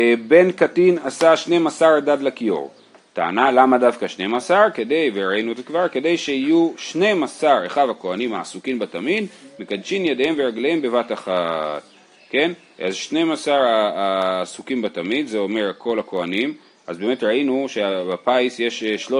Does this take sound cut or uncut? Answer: uncut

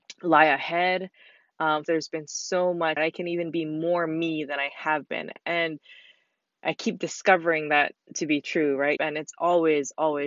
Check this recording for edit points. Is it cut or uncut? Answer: cut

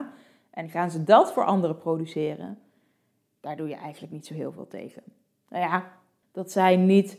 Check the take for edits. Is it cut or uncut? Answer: cut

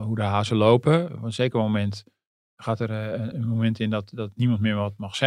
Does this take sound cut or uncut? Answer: cut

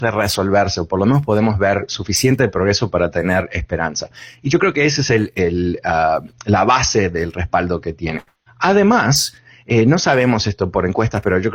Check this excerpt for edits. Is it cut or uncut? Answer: uncut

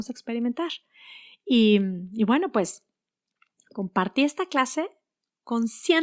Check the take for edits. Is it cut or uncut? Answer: uncut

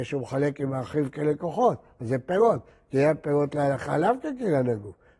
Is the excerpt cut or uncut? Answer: uncut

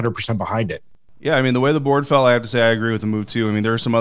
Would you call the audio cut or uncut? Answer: uncut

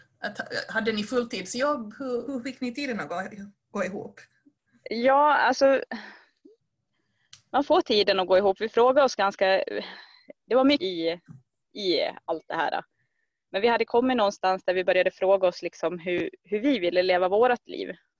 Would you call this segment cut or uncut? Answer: cut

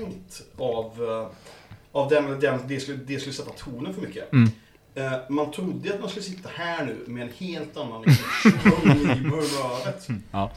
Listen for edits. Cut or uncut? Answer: uncut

